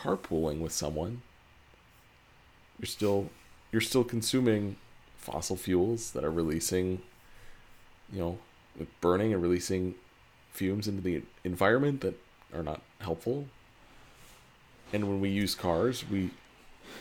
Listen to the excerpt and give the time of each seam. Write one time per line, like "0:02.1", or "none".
none